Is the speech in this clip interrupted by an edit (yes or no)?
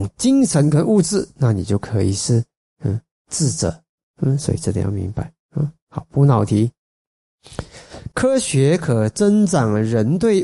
no